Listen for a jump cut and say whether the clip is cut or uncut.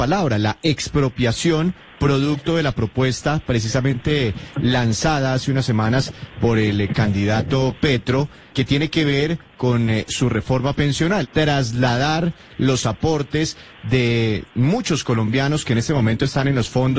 cut